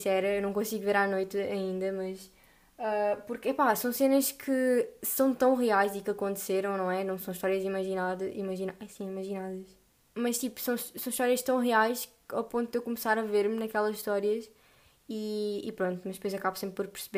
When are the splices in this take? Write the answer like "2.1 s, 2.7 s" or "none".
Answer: none